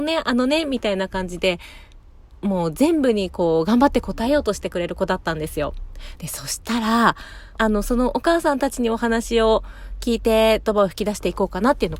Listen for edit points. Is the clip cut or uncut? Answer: cut